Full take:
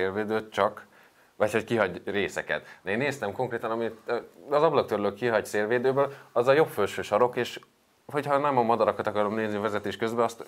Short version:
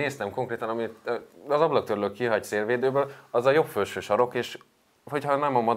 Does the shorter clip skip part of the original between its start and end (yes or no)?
no